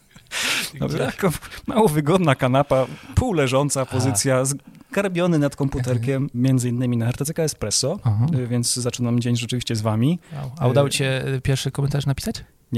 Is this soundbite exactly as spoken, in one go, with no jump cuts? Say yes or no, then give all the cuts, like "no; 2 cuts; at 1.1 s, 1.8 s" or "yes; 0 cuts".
no; 1 cut; at 6.3 s